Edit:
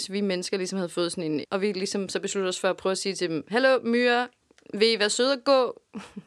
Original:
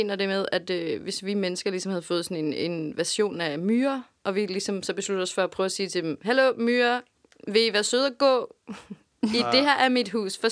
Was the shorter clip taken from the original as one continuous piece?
no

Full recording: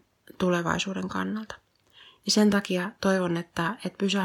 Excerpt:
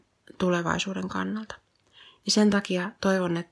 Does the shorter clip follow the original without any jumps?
yes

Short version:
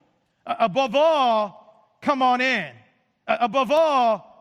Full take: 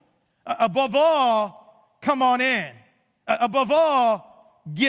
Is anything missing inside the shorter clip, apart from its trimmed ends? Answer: no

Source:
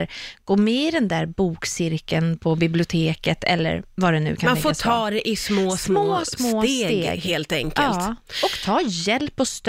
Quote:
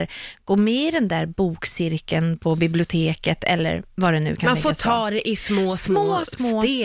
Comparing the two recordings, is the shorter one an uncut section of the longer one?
yes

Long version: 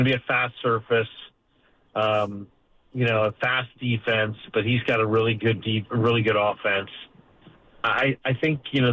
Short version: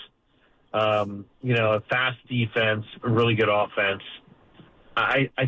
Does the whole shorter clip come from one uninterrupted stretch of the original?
no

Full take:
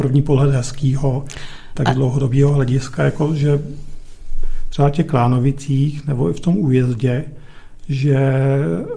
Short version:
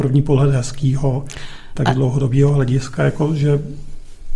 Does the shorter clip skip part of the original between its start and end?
no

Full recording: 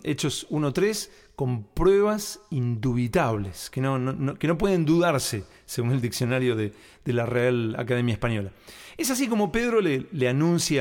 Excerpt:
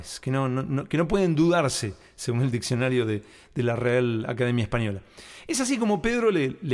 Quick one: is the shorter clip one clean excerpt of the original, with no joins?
yes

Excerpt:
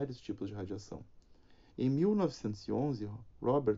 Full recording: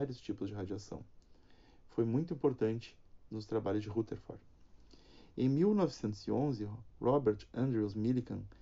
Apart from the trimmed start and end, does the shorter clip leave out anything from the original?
yes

